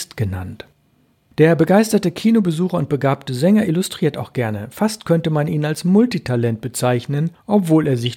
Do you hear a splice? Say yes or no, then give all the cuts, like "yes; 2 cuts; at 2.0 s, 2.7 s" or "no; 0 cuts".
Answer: no; 0 cuts